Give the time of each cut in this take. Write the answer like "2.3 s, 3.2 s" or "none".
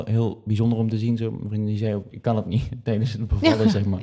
2.1 s